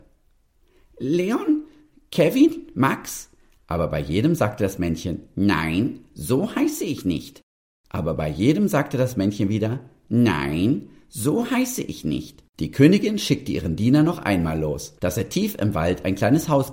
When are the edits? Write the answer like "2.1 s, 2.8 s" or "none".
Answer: 7.7 s, 12.5 s, 15.0 s